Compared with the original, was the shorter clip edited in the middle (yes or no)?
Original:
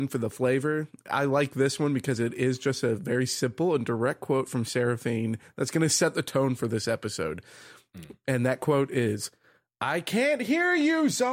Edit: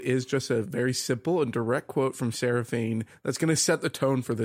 no